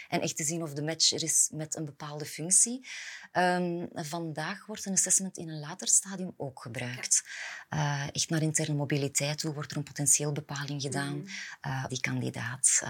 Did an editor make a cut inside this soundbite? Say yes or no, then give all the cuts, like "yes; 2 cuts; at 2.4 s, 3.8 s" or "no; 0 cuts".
yes; 1 cut; at 11.9 s